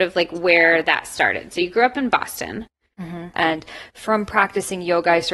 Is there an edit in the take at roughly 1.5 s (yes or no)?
no